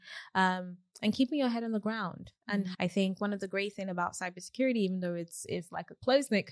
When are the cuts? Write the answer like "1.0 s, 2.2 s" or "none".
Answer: 2.7 s